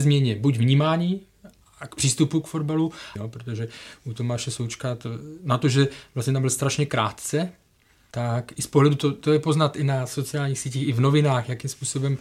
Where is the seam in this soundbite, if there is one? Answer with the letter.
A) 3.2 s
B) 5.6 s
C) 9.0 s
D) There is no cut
A